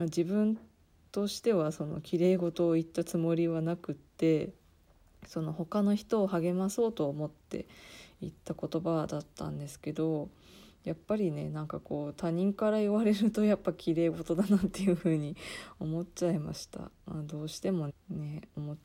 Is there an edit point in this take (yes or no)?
yes